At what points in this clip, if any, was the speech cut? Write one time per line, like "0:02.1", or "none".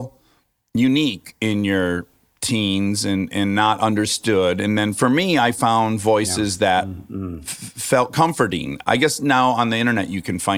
none